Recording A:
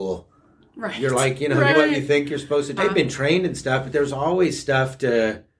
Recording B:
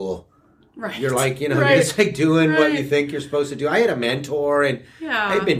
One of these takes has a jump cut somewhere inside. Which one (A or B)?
A